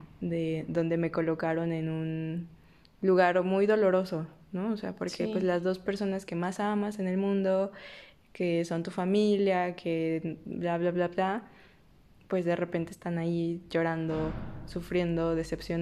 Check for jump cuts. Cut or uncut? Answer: uncut